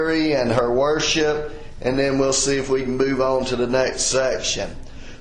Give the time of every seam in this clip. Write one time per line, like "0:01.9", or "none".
none